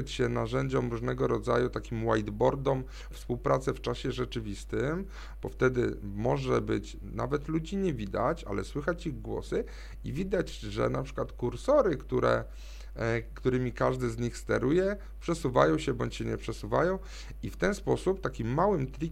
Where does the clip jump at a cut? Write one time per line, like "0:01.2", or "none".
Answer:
0:03.1